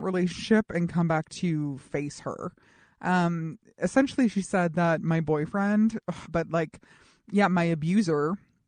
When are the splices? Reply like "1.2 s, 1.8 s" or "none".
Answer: 6.3 s